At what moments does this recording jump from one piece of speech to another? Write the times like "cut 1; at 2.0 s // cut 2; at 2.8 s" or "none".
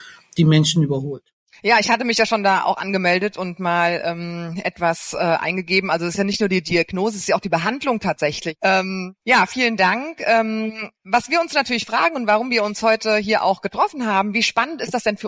none